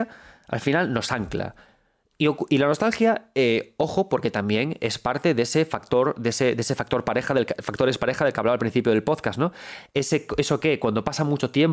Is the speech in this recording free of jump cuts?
yes; 0 cuts

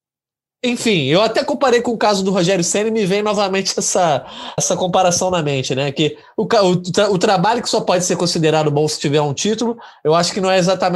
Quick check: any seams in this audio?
yes; 1 cut; at 4.6 s

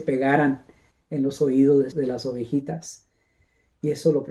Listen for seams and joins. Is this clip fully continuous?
no; 1 cut; at 1.9 s

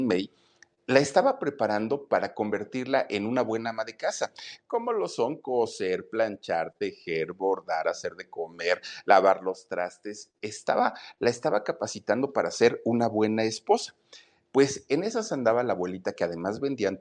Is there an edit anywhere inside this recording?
yes; 1 cut; at 4.6 s

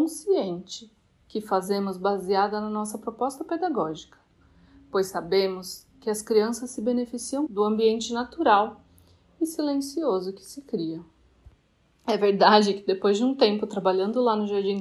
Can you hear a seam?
yes; 1 cut; at 7.5 s

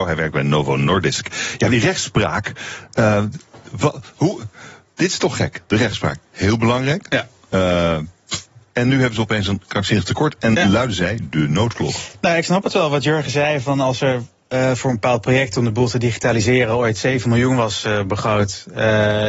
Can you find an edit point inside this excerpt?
no; 0 cuts

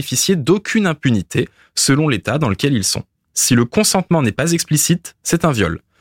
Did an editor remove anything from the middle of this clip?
yes; 1 cut; at 3.2 s

